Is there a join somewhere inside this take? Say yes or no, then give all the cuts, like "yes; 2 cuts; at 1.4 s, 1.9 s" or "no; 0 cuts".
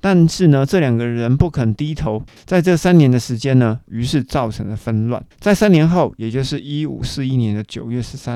yes; 3 cuts; at 2.4 s, 3.8 s, 5.3 s